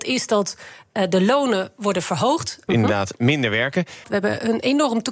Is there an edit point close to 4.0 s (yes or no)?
yes